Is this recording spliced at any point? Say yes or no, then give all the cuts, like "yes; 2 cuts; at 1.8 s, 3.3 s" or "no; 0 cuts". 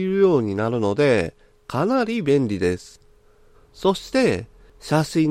yes; 1 cut; at 3.5 s